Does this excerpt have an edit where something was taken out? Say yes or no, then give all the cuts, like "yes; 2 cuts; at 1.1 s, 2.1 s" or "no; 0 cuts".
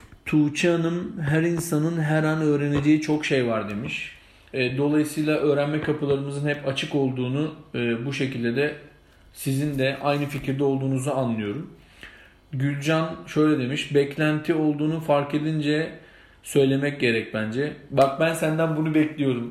no; 0 cuts